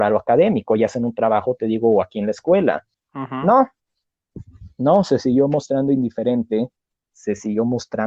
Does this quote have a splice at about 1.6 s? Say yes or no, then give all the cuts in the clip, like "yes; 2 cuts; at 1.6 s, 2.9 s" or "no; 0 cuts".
no; 1 cut; at 2.9 s